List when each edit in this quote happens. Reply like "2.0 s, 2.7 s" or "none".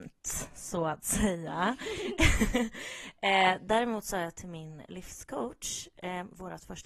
none